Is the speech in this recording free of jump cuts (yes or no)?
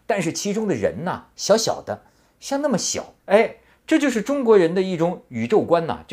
no